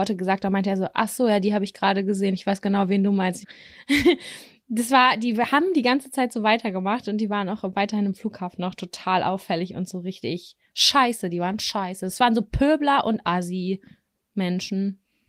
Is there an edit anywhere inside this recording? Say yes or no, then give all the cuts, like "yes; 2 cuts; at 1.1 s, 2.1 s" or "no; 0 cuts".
yes; 1 cut; at 3.4 s